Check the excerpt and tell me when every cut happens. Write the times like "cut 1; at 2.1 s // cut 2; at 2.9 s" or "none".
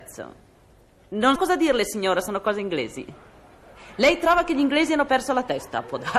cut 1; at 1.4 s